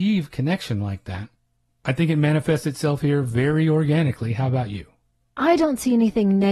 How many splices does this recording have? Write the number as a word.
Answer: zero